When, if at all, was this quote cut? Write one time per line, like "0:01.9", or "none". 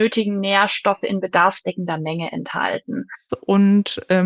0:03.3